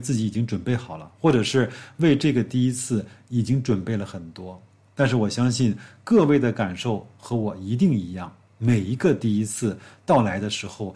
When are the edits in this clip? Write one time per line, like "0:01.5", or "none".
none